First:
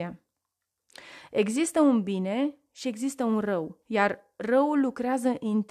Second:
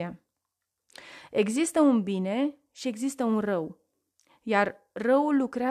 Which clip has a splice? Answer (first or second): first